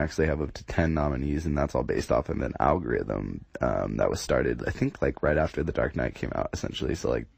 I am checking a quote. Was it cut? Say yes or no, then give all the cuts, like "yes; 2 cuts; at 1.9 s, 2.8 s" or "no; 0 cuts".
no; 0 cuts